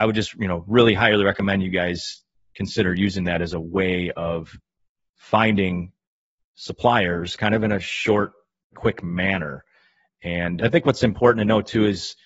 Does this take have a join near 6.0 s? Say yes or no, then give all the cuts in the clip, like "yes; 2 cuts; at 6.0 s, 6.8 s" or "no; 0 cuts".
no; 2 cuts; at 8.7 s, 10.6 s